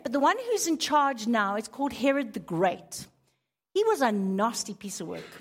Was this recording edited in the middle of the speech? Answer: no; 0 cuts

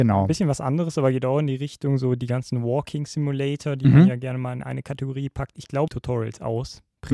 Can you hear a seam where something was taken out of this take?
yes; 1 cut; at 5.9 s

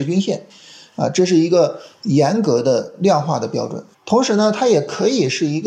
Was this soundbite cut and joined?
yes; 1 cut; at 3.9 s

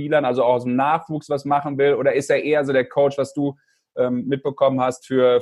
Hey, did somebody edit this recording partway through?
no; 0 cuts

